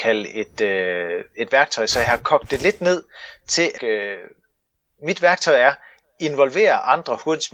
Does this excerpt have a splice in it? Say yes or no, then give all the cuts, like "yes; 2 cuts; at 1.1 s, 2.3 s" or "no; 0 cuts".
yes; 1 cut; at 3.8 s